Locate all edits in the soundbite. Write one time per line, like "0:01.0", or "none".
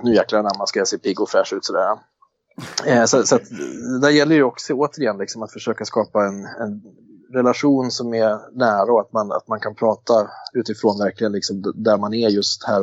none